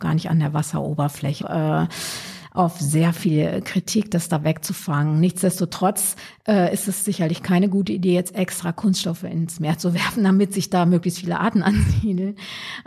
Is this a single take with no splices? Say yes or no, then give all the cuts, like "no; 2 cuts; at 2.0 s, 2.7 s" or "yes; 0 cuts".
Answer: no; 1 cut; at 1.4 s